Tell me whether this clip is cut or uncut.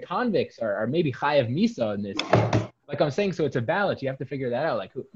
uncut